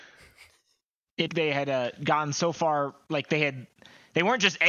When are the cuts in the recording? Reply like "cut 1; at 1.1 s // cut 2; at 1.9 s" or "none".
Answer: cut 1; at 1.3 s